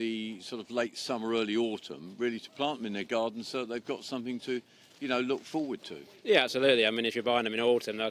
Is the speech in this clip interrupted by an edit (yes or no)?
no